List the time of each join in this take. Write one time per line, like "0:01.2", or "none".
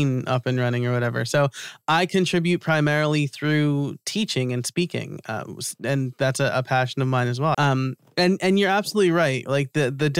0:07.5